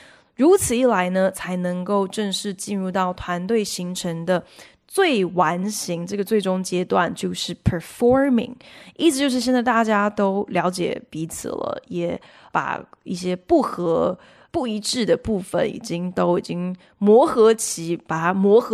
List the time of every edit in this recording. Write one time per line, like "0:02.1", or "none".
none